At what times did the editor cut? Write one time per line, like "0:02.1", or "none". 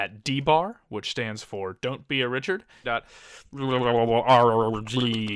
0:02.8